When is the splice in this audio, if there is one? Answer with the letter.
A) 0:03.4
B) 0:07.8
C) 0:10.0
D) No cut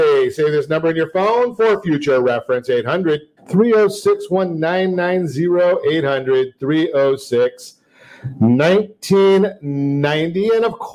A